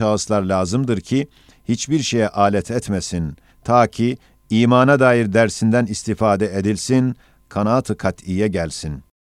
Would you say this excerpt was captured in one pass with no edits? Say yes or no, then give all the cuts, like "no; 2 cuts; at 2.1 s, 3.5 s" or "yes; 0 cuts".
no; 2 cuts; at 1.5 s, 3.5 s